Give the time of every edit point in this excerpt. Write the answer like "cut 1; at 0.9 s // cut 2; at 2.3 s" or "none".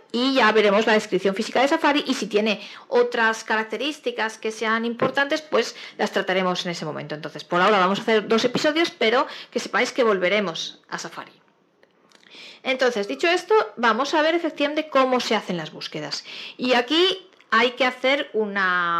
none